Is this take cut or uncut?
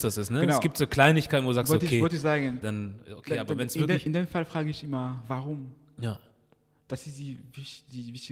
cut